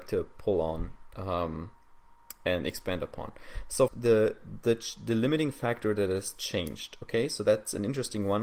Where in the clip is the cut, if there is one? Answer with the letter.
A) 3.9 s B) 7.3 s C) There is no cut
A